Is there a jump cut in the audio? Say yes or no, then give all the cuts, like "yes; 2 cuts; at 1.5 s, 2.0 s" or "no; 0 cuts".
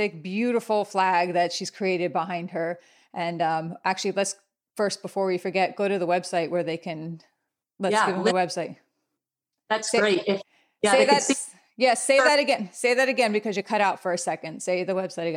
no; 0 cuts